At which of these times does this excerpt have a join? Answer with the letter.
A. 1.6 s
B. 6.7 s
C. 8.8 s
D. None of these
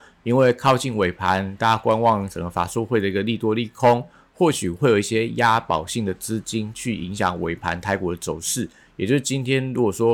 D